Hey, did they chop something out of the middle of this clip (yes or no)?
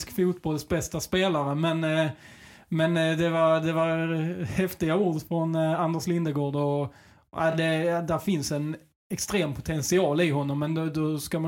no